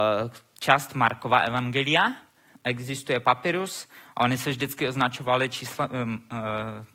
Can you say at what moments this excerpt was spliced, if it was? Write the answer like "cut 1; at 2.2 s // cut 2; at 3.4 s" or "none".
cut 1; at 2.5 s